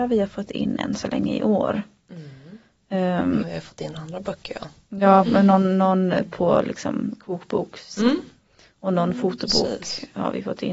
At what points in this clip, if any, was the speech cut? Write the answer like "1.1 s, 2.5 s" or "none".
3.4 s